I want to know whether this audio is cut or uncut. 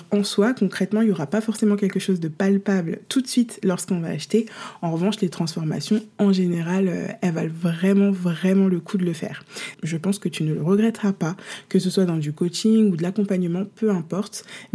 cut